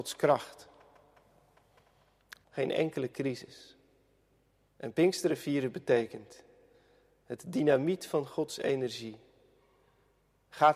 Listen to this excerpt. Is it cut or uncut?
cut